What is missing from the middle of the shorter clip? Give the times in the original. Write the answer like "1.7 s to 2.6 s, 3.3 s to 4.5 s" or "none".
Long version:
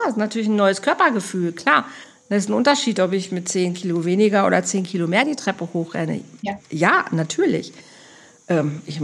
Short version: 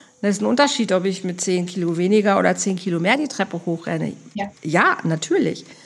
none

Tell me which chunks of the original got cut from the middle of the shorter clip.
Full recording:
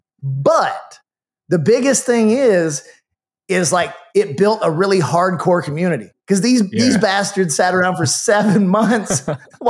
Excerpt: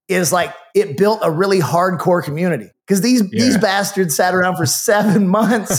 none

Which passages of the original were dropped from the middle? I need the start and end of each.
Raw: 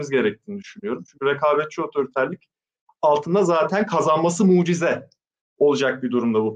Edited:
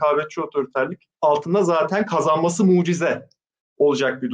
2.6 s to 3.0 s

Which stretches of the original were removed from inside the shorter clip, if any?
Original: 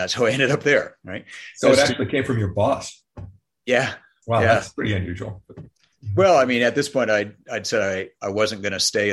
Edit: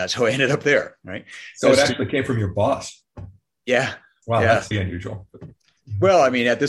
4.7 s to 4.9 s

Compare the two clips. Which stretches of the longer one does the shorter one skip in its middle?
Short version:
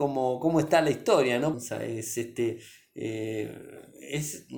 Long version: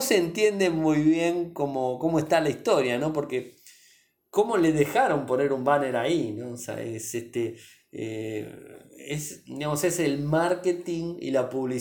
3.1 s to 6.5 s

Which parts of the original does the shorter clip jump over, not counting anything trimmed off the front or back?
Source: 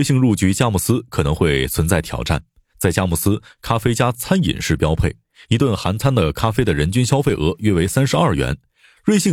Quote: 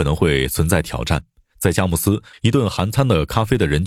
3.5 s to 5.4 s

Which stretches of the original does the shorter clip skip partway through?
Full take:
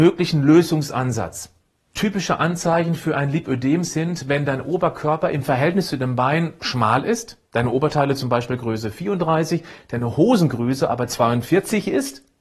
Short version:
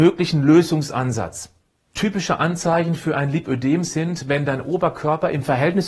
none

